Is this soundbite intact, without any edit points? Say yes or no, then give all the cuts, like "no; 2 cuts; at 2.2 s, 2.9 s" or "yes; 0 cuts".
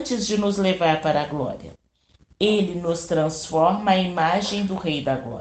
yes; 0 cuts